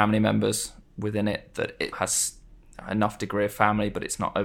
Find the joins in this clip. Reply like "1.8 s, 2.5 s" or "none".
1.9 s